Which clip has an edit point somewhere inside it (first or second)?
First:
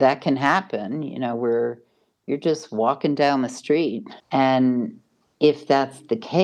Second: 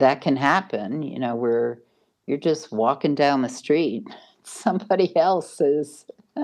first